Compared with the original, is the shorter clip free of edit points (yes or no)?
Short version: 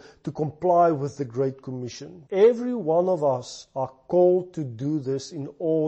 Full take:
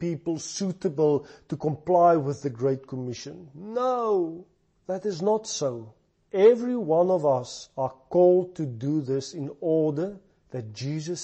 no